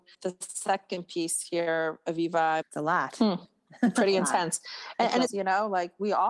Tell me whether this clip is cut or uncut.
cut